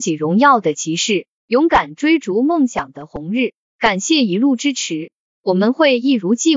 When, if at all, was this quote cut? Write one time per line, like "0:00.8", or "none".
none

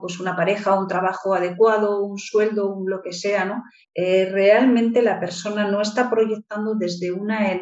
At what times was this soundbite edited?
0:03.8

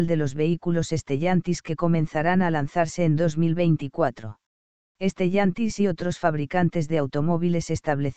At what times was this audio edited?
0:04.9

